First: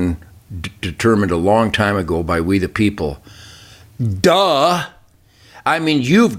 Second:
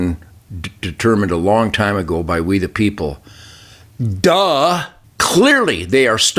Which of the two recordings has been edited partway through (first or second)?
second